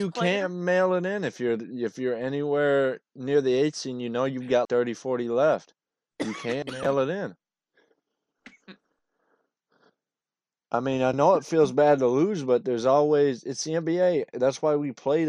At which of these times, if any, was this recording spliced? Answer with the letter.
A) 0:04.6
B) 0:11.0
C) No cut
A